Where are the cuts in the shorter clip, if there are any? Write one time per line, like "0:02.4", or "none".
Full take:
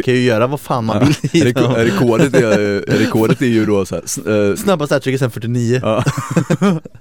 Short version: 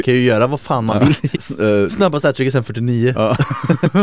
0:01.3